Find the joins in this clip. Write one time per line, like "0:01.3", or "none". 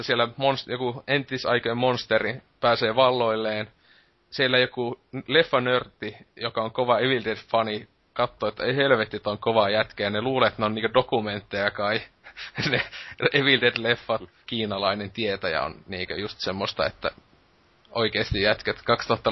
0:14.4